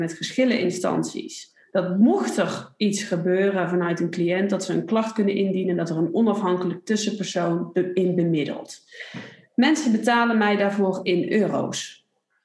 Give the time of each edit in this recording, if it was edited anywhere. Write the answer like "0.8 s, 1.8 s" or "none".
none